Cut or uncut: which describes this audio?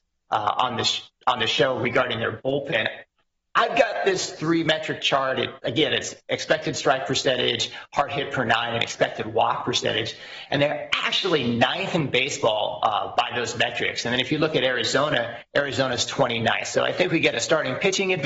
uncut